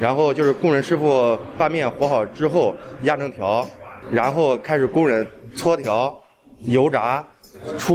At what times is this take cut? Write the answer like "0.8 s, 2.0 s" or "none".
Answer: none